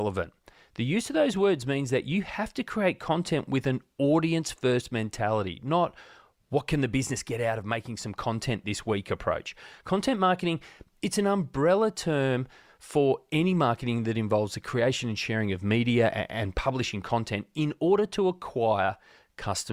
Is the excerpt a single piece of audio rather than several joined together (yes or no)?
yes